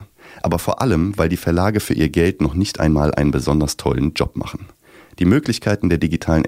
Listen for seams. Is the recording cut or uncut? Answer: uncut